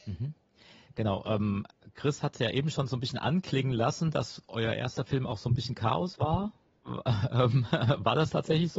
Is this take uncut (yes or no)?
yes